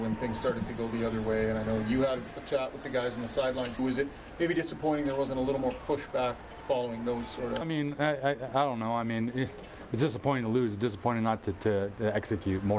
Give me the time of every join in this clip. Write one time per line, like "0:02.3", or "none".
0:03.8
0:07.6